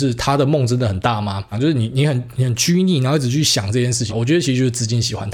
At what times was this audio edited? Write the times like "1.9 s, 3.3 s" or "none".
1.5 s, 4.1 s